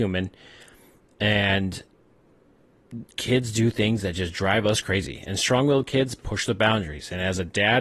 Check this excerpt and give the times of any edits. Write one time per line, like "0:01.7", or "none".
none